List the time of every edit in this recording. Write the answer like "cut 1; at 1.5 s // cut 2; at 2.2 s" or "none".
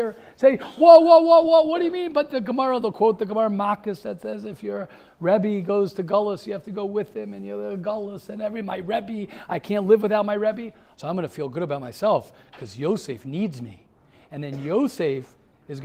cut 1; at 10.9 s